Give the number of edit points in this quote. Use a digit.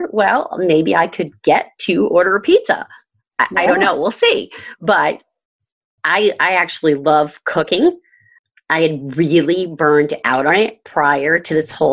0